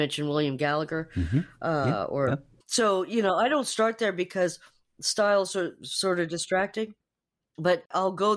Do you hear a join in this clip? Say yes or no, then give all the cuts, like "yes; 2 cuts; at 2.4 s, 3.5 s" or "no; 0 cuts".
yes; 1 cut; at 2.6 s